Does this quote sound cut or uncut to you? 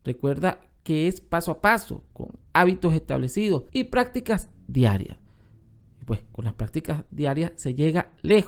cut